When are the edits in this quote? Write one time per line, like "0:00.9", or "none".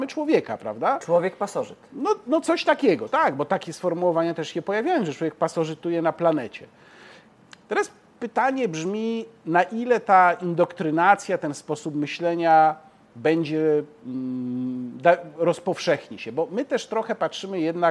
none